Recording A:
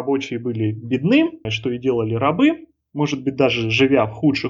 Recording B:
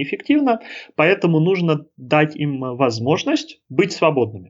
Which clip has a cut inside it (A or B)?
A